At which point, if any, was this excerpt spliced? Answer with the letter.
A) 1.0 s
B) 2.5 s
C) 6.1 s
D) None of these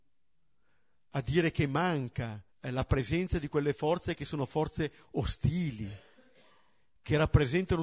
B